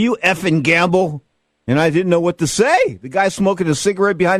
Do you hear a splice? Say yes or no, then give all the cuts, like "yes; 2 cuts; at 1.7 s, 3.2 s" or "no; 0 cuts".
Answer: no; 0 cuts